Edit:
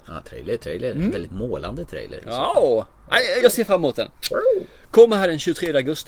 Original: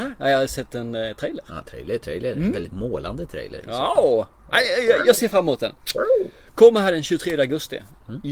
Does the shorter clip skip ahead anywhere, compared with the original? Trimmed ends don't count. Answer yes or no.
yes